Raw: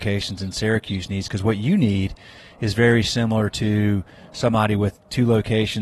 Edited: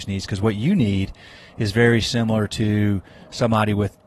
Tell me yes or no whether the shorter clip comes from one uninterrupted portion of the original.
yes